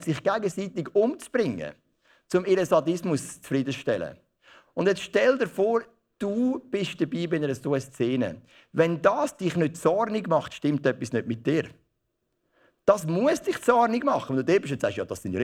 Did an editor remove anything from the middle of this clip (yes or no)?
no